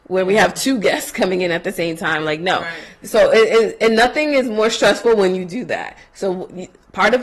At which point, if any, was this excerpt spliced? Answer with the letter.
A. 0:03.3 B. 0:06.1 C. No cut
C